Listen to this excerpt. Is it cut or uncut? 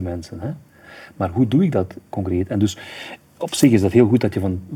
uncut